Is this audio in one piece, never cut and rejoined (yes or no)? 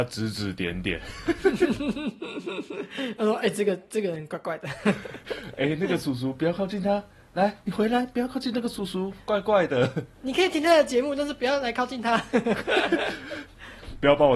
yes